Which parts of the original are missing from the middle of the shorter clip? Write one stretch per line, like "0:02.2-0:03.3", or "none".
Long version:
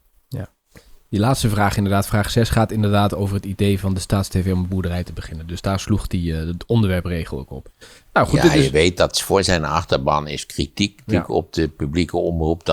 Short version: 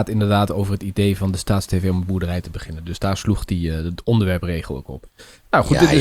none